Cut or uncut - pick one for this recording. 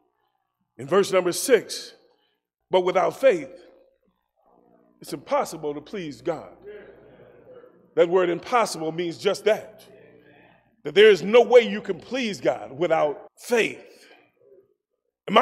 cut